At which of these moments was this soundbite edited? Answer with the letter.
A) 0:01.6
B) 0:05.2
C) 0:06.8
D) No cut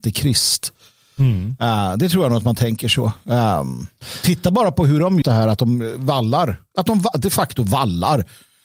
B